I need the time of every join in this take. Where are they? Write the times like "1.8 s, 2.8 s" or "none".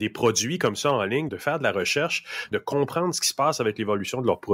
1.3 s, 2.5 s